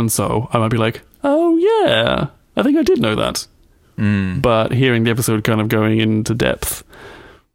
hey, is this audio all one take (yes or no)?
yes